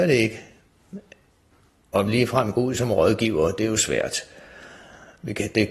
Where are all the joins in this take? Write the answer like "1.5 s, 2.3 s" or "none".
none